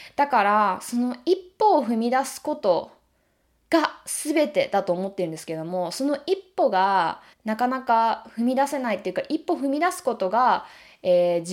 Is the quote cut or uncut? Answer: cut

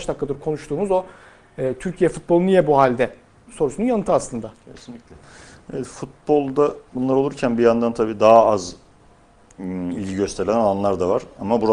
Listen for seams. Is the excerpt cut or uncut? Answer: cut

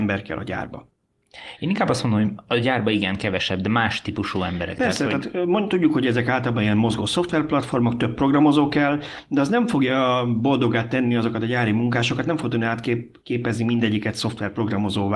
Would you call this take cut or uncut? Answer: uncut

